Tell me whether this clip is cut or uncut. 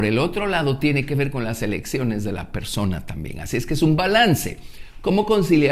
uncut